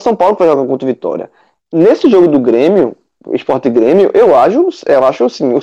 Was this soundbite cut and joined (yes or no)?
no